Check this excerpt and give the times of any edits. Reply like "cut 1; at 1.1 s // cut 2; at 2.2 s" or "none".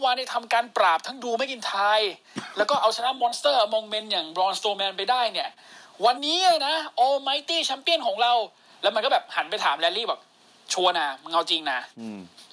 cut 1; at 6.2 s